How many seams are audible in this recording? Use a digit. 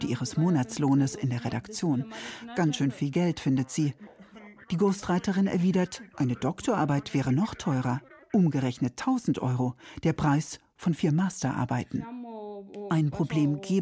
0